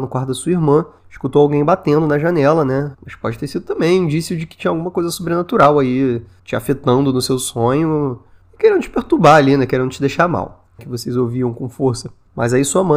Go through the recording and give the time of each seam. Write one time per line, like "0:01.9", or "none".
0:02.9
0:10.8